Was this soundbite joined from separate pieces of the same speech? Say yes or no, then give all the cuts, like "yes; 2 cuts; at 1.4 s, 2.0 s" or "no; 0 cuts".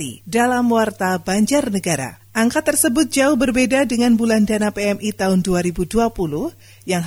yes; 1 cut; at 2.2 s